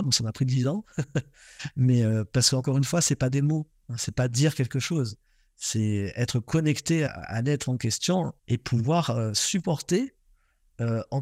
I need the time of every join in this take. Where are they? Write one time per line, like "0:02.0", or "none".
0:07.1
0:08.4